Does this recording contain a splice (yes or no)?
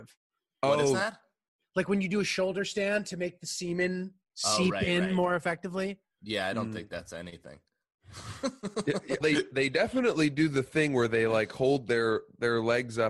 yes